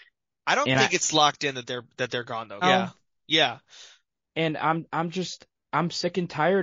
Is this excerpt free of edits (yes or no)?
no